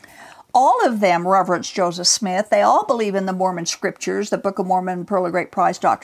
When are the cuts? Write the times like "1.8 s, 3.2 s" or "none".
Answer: none